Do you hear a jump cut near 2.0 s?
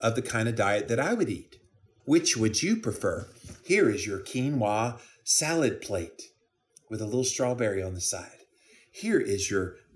yes; 1 cut; at 2.0 s

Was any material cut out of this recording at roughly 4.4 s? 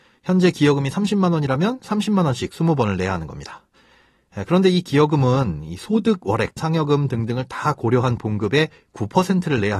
no; 1 cut; at 6.6 s

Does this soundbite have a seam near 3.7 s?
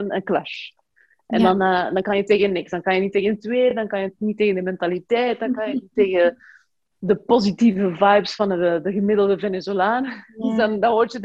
no; 0 cuts

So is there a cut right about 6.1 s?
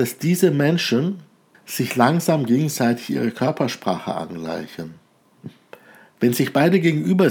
no; 1 cut; at 1.5 s

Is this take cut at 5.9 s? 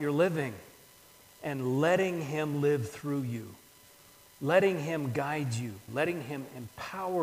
yes; 1 cut; at 5.9 s

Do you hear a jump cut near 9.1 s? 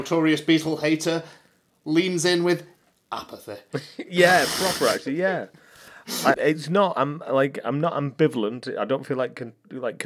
no; 1 cut; at 6.3 s

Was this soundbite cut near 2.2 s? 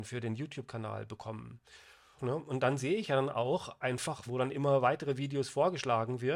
yes; 2 cuts; at 2.2 s, 4.3 s

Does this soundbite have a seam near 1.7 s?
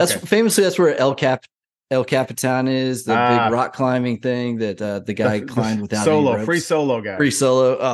no; 0 cuts

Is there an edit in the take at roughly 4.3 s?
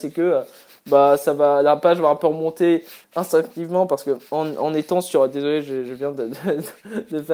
yes; 1 cut; at 4.3 s

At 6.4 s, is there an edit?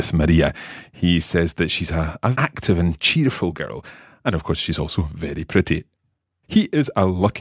yes; 2 cuts; at 2.3 s, 6.4 s

